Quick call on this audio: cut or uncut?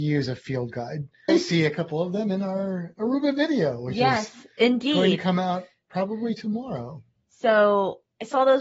cut